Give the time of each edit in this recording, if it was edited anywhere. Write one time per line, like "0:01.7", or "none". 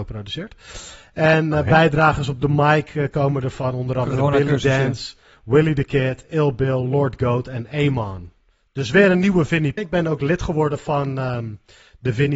0:09.8